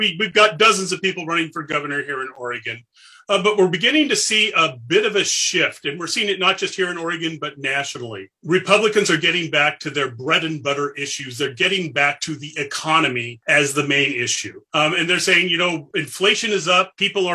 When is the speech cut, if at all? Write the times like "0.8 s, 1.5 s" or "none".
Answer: none